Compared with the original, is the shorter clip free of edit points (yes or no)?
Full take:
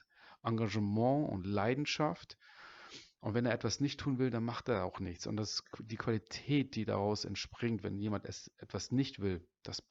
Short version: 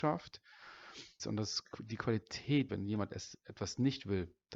no